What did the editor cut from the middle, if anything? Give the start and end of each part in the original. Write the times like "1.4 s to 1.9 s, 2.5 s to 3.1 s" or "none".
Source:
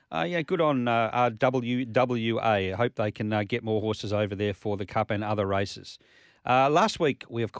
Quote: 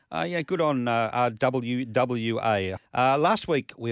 2.8 s to 6.3 s

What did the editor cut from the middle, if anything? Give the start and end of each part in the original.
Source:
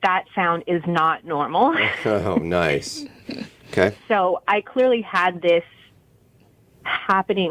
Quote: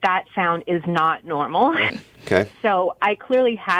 1.9 s to 3.4 s

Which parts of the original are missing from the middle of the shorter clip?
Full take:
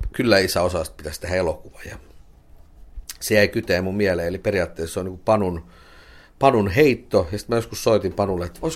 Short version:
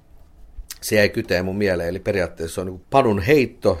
5.2 s to 6.3 s

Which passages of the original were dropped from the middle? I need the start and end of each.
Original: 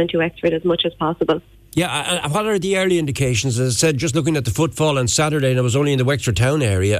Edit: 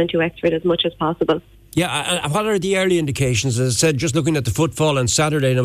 none

